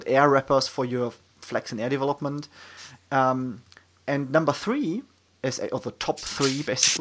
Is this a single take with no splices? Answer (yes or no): yes